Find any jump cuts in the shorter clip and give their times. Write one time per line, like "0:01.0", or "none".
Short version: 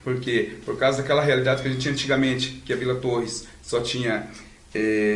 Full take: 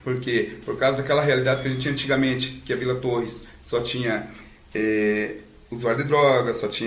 none